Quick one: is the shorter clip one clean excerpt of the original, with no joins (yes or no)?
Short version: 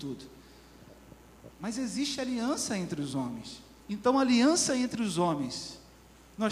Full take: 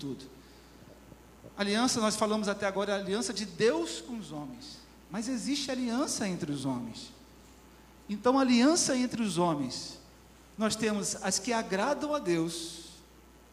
no